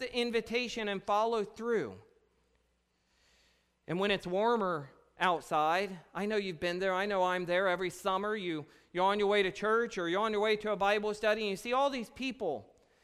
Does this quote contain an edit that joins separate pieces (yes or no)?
no